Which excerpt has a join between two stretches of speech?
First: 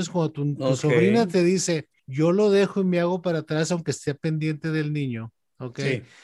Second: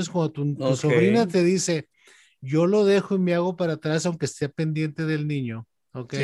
first; 1 cut; at 2.0 s

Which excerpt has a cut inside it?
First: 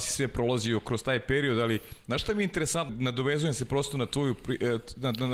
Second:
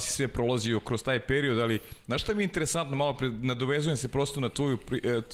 first; 1 cut; at 2.9 s

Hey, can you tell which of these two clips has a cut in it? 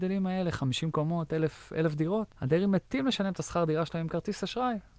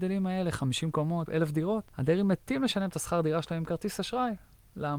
second; 1 cut; at 1.3 s

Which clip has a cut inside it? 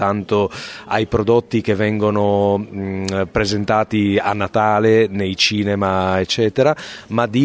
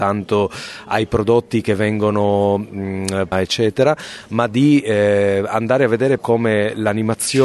second; 2 cuts; at 3.3 s, 6.2 s

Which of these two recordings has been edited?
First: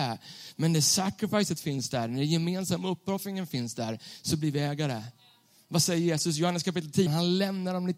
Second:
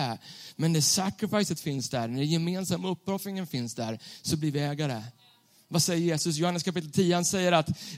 first; 1 cut; at 7.1 s

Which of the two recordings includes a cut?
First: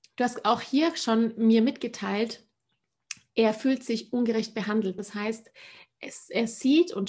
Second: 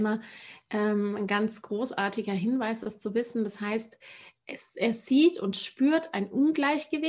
first; 1 cut; at 5.0 s

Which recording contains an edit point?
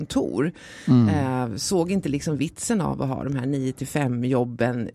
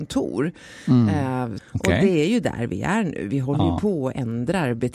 second; 1 cut; at 1.6 s

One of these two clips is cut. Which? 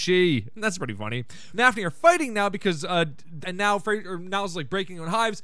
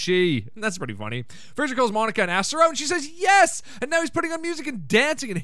first; 2 cuts; at 1.5 s, 3.4 s

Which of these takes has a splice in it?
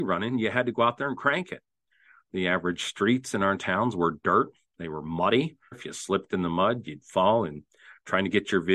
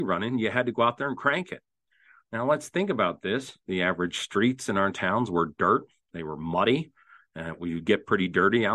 first; 2 cuts; at 2.3 s, 5.7 s

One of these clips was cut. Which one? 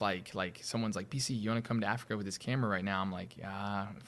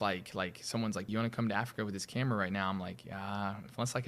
second; 1 cut; at 1.1 s

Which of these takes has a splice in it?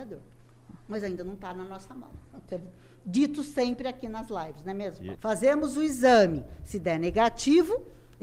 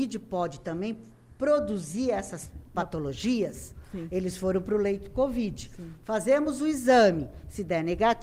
first; 2 cuts; at 2.5 s, 5.1 s

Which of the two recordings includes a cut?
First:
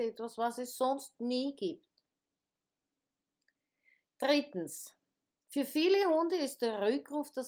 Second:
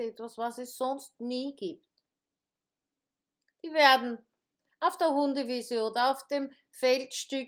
second; 1 cut; at 3.5 s

